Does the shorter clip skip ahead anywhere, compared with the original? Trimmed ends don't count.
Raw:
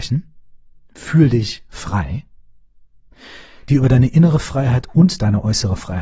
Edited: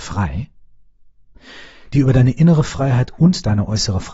no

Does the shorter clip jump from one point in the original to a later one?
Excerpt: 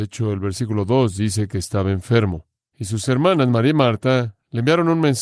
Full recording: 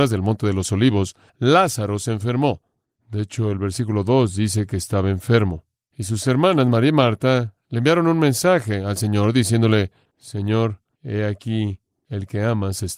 no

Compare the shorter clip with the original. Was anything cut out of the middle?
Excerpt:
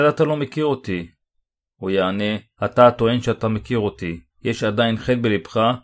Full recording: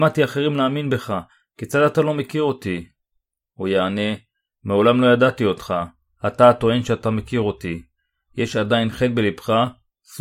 yes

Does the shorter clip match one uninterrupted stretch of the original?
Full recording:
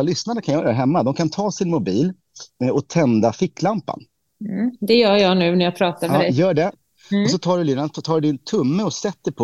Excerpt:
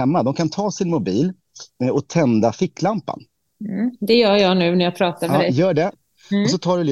yes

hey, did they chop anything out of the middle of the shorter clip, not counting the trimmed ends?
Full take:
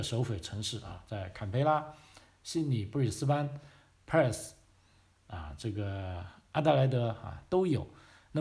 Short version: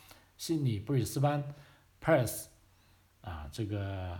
no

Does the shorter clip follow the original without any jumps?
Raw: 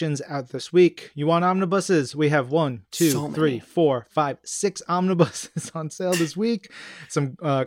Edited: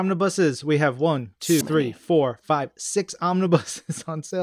no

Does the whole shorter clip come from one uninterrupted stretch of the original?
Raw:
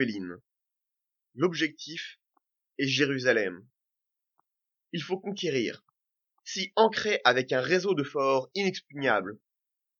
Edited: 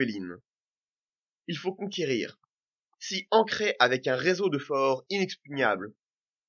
no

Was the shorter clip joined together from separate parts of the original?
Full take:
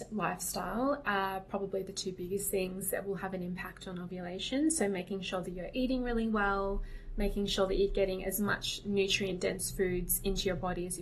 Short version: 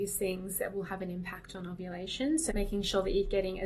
yes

